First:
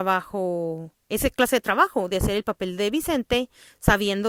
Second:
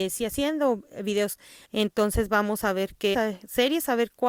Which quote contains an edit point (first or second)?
second